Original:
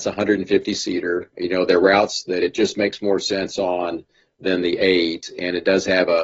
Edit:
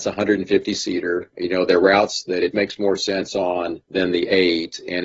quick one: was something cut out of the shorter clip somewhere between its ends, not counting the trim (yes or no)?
yes